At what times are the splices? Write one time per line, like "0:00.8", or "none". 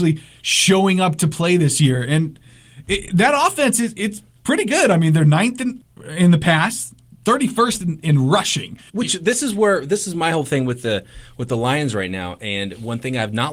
0:08.9